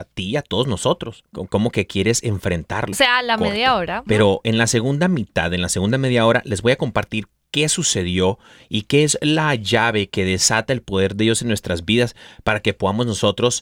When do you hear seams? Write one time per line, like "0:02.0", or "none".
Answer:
0:01.3
0:02.9
0:04.1